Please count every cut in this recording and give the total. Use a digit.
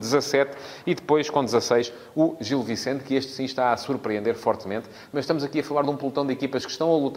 0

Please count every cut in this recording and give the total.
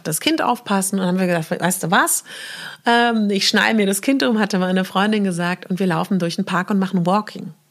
0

